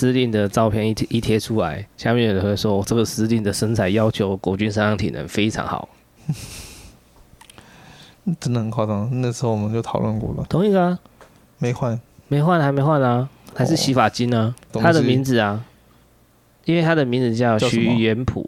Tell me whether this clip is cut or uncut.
cut